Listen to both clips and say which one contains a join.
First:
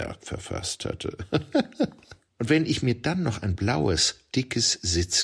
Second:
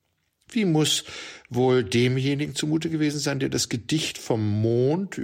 first; 2 cuts; at 2.3 s, 4.3 s

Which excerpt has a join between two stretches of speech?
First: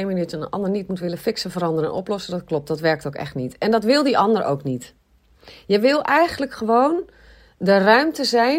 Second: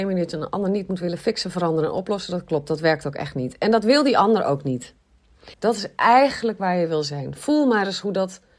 second; 1 cut; at 5.5 s

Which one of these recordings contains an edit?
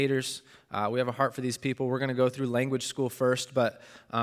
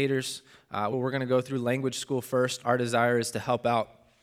second; 2 cuts; at 0.9 s, 2.6 s

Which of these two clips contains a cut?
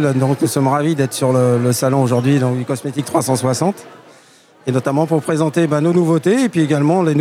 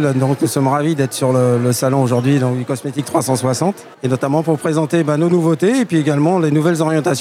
second; 1 cut; at 3.9 s

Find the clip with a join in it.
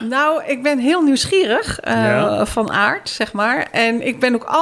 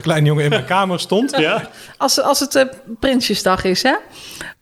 second; 1 cut; at 1.6 s

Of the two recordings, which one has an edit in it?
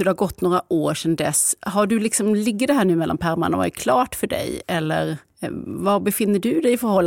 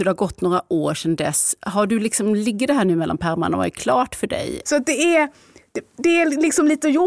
second; 1 cut; at 4.6 s

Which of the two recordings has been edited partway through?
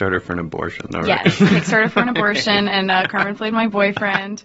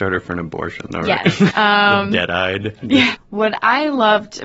second; 2 cuts; at 1.5 s, 3.1 s

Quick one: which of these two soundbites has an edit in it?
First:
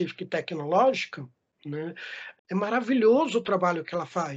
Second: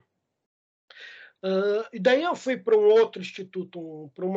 first; 1 cut; at 2.4 s

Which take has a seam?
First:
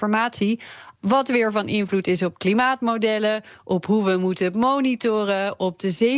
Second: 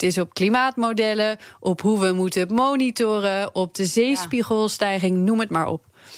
first; 1 cut; at 1.0 s

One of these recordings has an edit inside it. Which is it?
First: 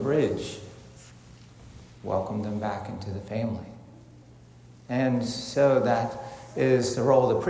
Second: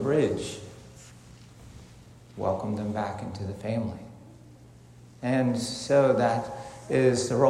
first; 1 cut; at 2.0 s

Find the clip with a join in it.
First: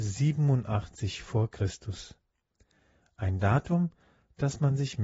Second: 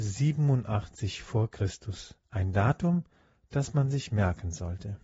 second; 1 cut; at 2.2 s

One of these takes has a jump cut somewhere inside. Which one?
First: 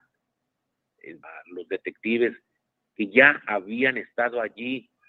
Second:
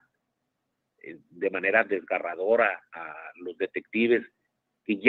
first; 1 cut; at 1.2 s

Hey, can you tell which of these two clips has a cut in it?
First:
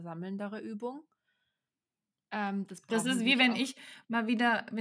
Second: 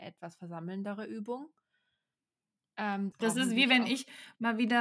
second; 1 cut; at 3.1 s

